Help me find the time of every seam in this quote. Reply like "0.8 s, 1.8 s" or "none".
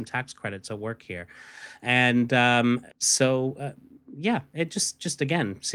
2.9 s